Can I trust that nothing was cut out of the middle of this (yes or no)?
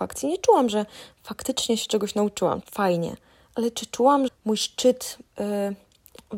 no